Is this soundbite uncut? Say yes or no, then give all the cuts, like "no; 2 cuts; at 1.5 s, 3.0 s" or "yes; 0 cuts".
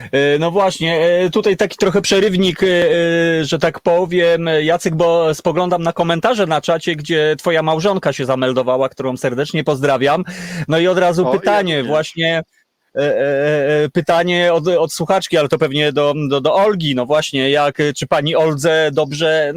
yes; 0 cuts